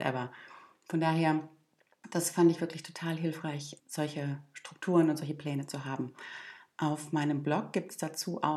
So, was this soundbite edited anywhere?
yes; 1 cut; at 3.8 s

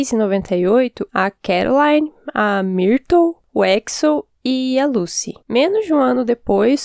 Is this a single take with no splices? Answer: no; 2 cuts; at 1.1 s, 5.4 s

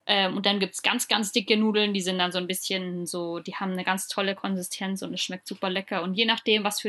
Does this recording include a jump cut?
no; 0 cuts

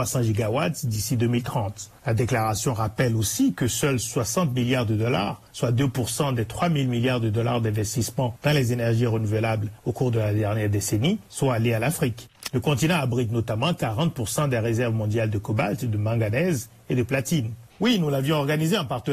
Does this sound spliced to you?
yes; 2 cuts; at 12.5 s, 17.7 s

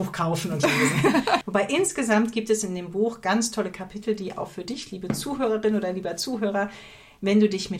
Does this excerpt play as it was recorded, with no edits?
no; 1 cut; at 1.4 s

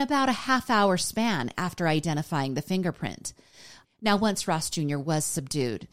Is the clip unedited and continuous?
no; 1 cut; at 3.8 s

